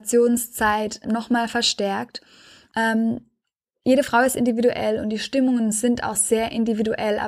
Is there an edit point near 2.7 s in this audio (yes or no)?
yes